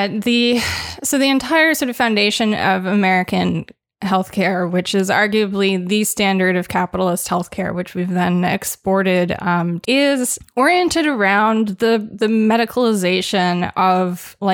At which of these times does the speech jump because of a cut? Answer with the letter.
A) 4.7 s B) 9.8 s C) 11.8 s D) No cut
B